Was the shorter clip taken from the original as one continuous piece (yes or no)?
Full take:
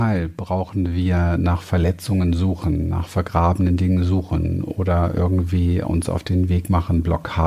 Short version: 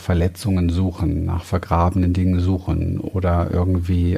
yes